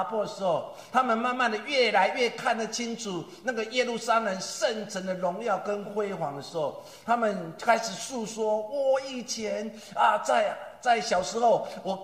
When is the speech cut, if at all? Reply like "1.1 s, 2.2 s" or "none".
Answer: none